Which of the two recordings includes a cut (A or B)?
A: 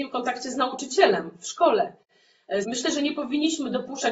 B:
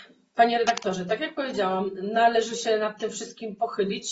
A